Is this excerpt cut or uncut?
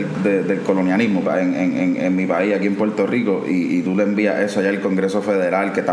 cut